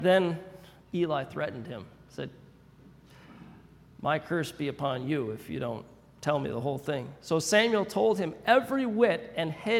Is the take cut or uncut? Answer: uncut